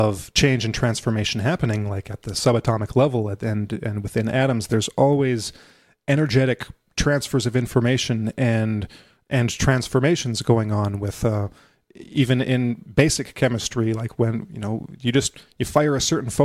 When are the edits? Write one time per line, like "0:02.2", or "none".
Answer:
none